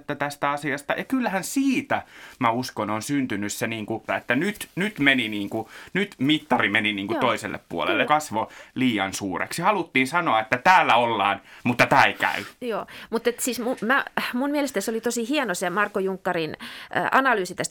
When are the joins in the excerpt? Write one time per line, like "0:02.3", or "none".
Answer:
0:04.1
0:08.0